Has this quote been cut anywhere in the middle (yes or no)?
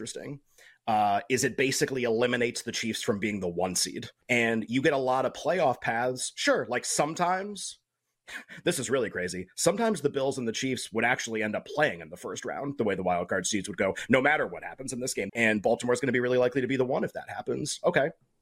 yes